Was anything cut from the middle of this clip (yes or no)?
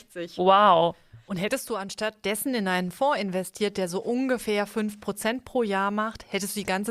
no